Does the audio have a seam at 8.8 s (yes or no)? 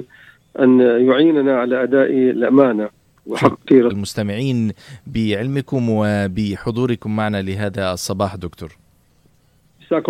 no